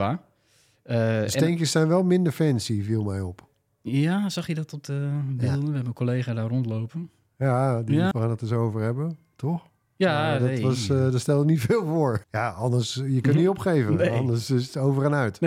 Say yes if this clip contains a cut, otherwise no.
yes